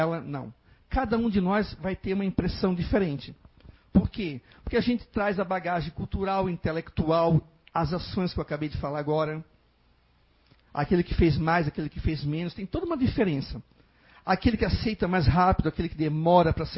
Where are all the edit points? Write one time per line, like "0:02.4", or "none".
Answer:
none